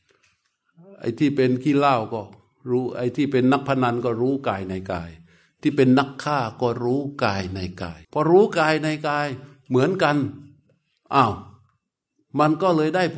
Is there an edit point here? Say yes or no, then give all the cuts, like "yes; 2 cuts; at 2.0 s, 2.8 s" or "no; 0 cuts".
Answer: yes; 1 cut; at 8.0 s